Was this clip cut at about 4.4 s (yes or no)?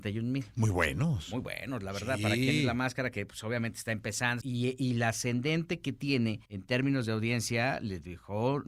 yes